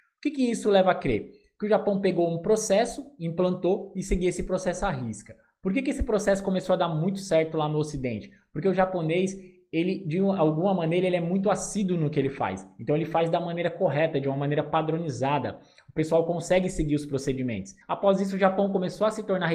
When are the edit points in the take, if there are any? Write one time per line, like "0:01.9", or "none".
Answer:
0:17.8